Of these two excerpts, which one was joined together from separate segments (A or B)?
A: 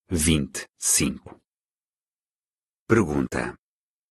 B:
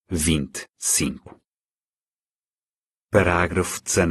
A